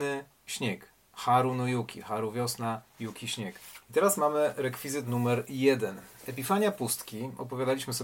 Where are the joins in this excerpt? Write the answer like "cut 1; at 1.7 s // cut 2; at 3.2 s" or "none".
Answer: cut 1; at 3.8 s